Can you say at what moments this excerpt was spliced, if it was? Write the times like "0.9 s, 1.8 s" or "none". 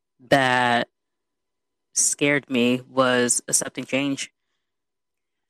none